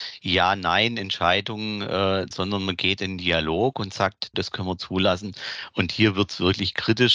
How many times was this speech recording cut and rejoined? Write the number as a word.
two